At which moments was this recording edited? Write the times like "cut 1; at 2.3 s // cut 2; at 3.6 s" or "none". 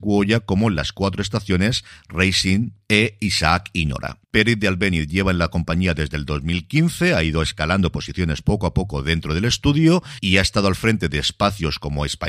cut 1; at 4.2 s

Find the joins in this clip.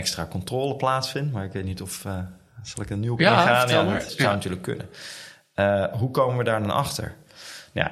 cut 1; at 4.1 s

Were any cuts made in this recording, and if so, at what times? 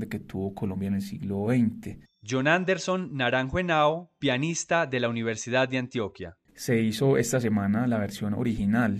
cut 1; at 2.1 s // cut 2; at 6.5 s

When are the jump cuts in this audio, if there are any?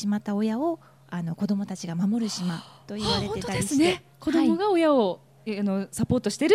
cut 1; at 4.1 s

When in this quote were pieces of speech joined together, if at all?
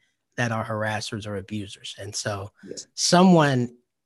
none

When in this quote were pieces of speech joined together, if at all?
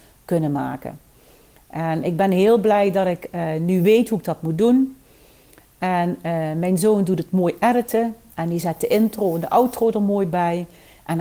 none

